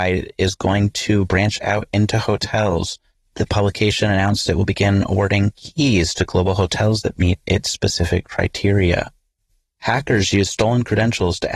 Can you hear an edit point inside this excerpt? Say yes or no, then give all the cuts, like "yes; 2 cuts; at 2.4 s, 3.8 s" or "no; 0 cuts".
no; 0 cuts